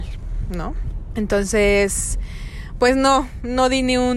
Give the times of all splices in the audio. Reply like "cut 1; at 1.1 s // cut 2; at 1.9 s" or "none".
cut 1; at 1.1 s